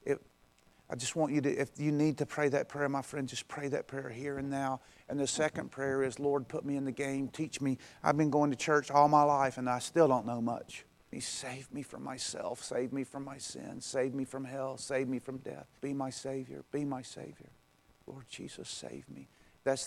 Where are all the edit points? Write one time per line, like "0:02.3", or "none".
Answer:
0:11.1
0:15.8